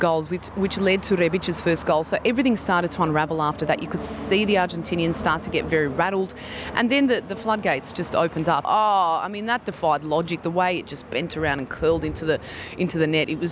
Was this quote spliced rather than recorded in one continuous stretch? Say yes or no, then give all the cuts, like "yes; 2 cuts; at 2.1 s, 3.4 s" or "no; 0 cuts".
yes; 1 cut; at 8.6 s